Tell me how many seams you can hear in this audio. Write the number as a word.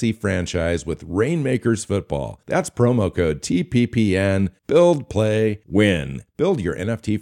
one